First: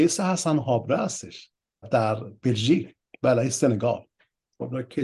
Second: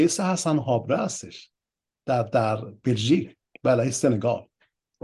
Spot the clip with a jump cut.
first; 1 cut; at 1.8 s

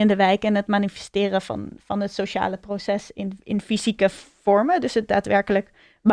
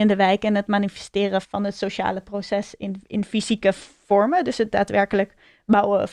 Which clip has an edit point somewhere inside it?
second; 1 cut; at 1.4 s

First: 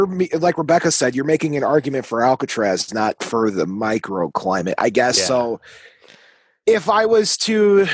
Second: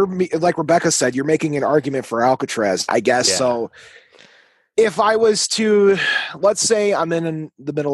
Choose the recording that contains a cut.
second; 1 cut; at 2.9 s

